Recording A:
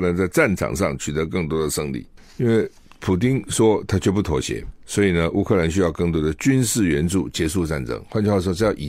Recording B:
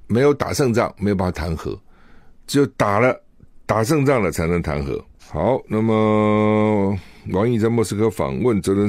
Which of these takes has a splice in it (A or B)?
B